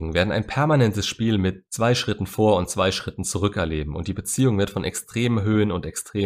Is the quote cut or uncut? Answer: uncut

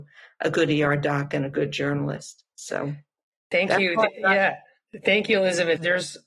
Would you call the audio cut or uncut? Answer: uncut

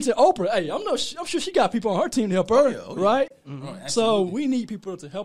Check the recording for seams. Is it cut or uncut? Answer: uncut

